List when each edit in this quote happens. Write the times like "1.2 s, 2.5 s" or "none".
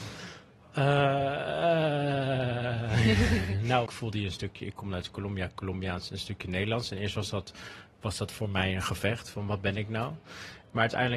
3.9 s